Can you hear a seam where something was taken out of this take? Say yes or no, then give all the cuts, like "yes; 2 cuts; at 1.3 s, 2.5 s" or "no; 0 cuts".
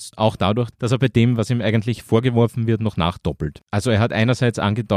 no; 0 cuts